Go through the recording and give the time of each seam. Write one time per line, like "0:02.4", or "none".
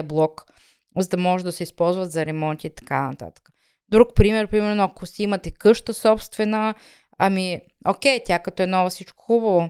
none